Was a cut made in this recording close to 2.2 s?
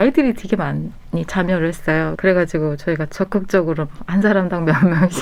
yes; 1 cut; at 2.2 s

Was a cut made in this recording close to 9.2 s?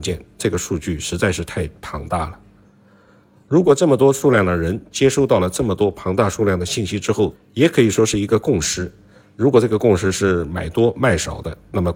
no; 1 cut; at 7.3 s

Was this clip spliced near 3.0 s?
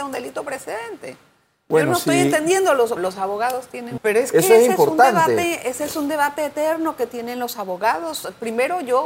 yes; 2 cuts; at 3.0 s, 4.0 s

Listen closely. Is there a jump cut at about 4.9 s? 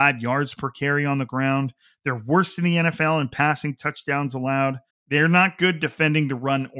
yes; 1 cut; at 4.9 s

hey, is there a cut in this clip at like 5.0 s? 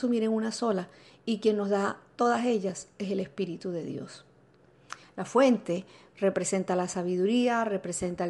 yes; 1 cut; at 5.0 s

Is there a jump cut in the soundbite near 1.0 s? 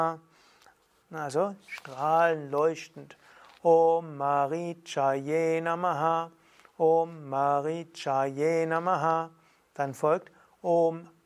yes; 1 cut; at 1.0 s

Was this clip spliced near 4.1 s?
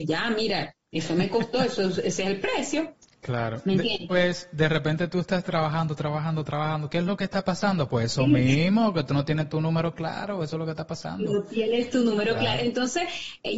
yes; 2 cuts; at 4.1 s, 6.9 s

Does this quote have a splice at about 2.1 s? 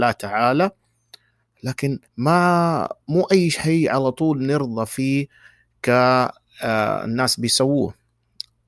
yes; 1 cut; at 2.1 s

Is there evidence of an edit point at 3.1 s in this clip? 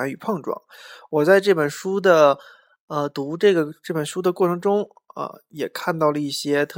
no; 0 cuts

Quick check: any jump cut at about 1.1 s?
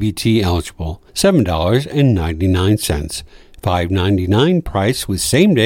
yes; 1 cut; at 1.1 s

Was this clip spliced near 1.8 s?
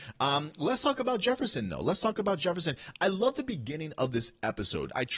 no; 0 cuts

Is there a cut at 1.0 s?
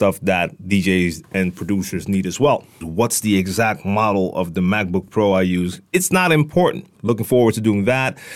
no; 3 cuts; at 2.8 s, 5.9 s, 7.0 s

